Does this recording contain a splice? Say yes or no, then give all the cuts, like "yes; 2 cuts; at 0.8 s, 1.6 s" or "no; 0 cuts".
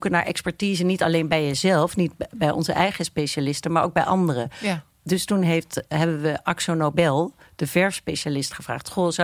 no; 0 cuts